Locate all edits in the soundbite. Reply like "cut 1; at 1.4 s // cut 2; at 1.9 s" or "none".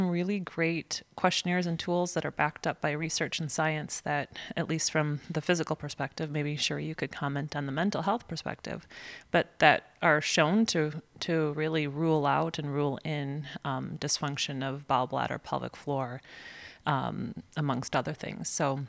none